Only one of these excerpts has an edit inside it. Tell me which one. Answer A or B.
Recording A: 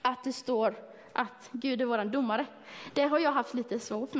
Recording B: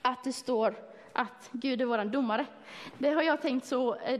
B